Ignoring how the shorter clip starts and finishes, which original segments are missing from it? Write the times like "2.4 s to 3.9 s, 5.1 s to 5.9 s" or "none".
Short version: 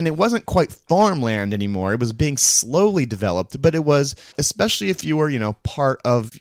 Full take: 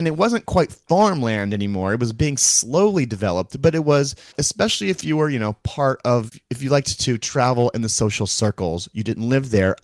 none